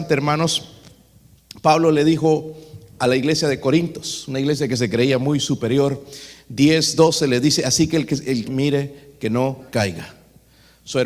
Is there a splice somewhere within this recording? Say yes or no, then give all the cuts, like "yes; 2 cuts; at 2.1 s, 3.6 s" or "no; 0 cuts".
yes; 2 cuts; at 8.4 s, 9.7 s